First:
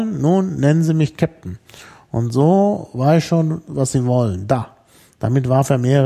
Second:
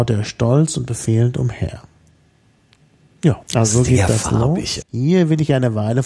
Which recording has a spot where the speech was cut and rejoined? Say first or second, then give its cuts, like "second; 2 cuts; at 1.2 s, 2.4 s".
second; 2 cuts; at 3.4 s, 4.8 s